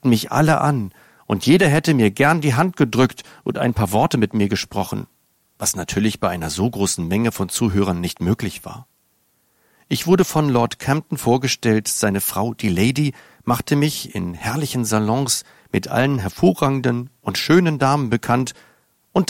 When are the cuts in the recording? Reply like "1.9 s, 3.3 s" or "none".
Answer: none